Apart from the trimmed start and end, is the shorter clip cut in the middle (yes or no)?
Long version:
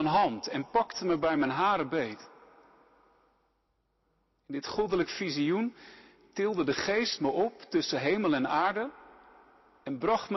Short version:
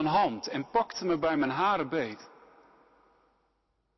no